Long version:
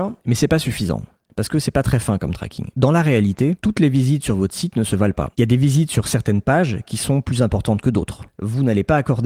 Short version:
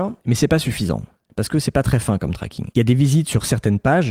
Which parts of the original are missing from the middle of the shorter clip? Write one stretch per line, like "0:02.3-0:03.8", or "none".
0:02.7-0:05.3